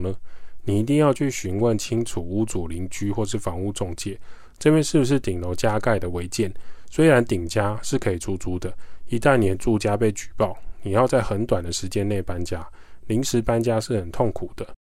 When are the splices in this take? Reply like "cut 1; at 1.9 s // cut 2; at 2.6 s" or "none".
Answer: none